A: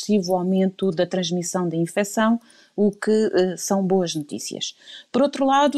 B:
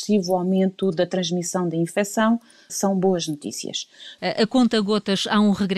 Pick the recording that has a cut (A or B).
B